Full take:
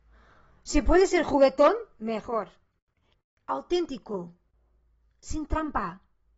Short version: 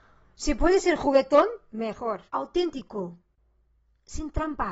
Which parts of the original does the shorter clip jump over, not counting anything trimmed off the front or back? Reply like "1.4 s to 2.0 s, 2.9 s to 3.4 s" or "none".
2.5 s to 3.4 s